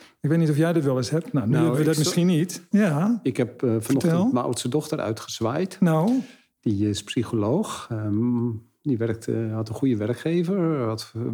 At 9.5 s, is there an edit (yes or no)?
no